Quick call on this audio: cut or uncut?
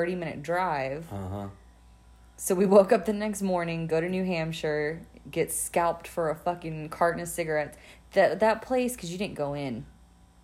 uncut